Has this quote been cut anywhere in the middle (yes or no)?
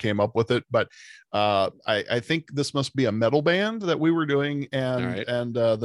no